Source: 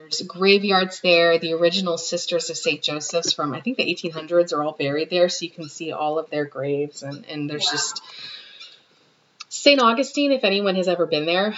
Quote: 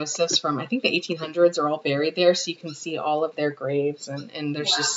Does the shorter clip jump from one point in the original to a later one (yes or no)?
no